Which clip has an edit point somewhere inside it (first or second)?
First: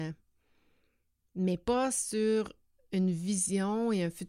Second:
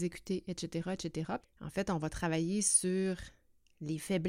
second